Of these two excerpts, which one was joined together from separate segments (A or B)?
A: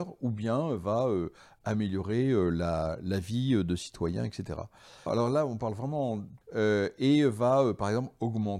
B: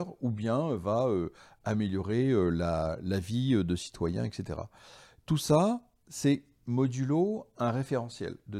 A